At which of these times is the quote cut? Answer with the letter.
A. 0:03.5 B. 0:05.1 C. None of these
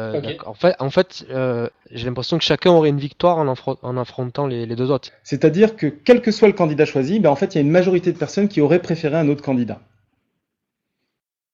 B